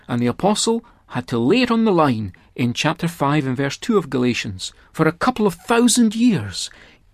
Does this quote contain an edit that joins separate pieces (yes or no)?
yes